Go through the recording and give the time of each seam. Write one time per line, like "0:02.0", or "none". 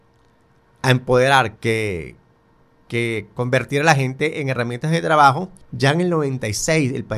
0:01.6
0:05.6